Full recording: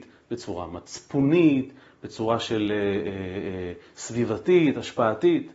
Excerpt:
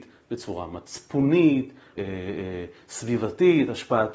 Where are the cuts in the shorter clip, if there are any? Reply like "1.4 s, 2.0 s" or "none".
2.0 s